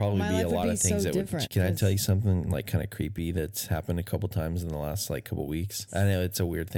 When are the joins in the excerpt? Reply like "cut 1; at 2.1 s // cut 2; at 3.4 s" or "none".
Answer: cut 1; at 1.4 s // cut 2; at 5.9 s